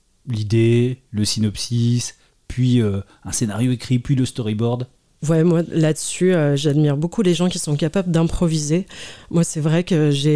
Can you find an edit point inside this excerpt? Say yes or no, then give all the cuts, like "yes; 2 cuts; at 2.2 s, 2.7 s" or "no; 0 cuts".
no; 0 cuts